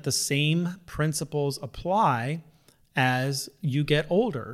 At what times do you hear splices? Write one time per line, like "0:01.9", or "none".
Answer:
none